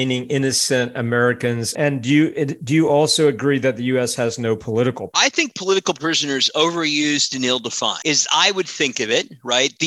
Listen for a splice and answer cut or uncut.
cut